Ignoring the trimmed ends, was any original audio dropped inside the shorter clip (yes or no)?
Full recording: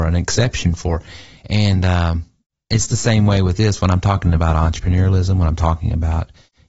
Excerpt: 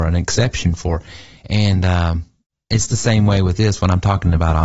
no